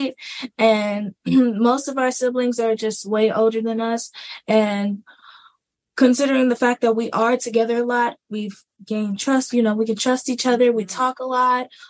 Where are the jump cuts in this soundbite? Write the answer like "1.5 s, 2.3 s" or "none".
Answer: none